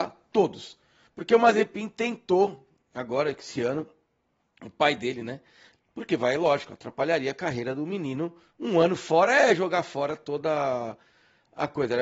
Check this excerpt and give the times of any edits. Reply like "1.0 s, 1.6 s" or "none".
1.1 s, 5.7 s